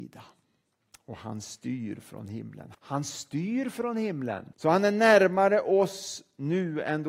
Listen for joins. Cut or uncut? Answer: cut